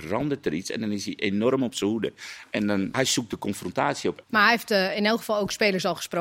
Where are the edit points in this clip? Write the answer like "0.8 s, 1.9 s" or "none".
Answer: 2.9 s, 4.2 s